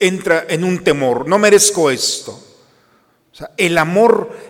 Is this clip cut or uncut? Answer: uncut